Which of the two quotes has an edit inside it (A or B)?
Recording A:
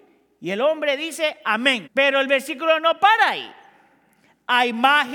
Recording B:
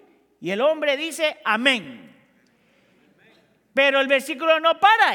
A